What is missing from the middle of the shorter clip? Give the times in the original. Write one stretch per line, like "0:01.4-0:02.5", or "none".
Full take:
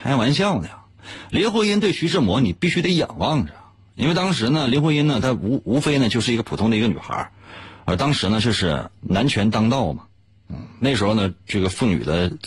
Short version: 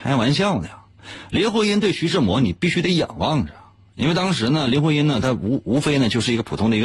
none